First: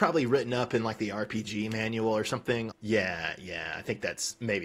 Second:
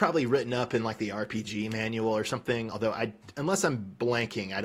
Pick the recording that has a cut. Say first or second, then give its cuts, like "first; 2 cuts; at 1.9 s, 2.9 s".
first; 1 cut; at 2.7 s